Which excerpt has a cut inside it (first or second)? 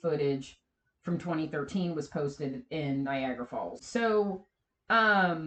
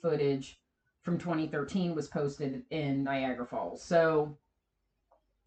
first